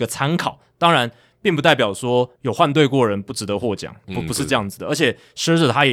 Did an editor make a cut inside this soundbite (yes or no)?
yes